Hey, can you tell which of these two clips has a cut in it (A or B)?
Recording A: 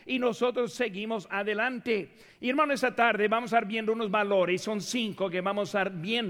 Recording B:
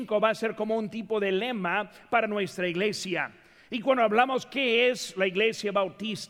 A